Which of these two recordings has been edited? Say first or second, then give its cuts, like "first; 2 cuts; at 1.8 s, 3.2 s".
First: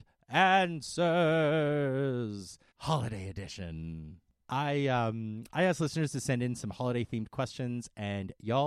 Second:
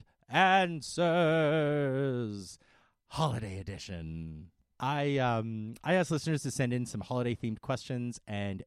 first; 1 cut; at 2.7 s